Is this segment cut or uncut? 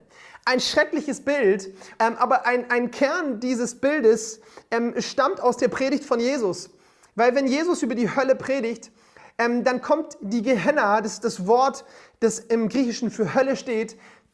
cut